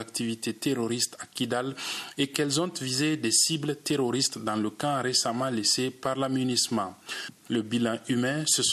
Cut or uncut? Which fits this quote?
cut